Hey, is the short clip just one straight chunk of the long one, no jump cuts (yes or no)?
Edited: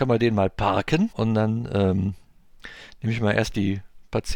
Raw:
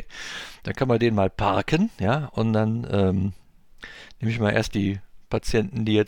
no